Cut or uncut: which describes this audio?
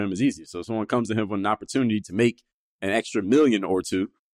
uncut